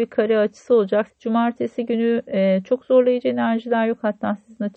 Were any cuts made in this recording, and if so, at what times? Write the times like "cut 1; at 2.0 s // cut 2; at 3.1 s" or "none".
cut 1; at 1.1 s